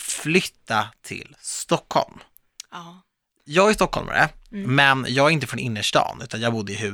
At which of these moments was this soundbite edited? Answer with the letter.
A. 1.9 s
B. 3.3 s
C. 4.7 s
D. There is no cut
D